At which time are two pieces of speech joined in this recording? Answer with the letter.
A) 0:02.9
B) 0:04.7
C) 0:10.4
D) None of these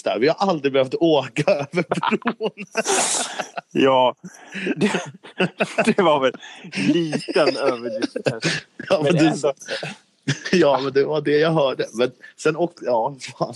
C